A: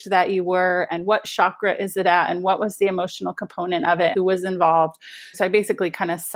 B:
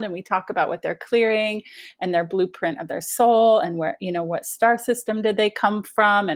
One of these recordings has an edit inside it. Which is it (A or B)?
A